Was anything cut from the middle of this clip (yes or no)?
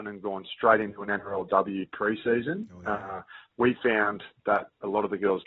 no